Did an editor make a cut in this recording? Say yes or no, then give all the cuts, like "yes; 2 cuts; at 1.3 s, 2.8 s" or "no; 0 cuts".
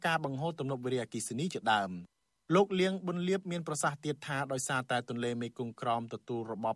no; 0 cuts